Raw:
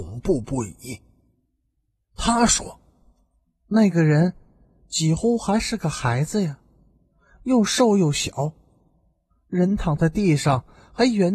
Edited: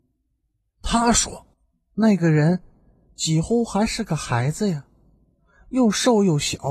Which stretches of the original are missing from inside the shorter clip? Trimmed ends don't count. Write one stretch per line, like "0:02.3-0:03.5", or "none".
0:02.9-0:03.3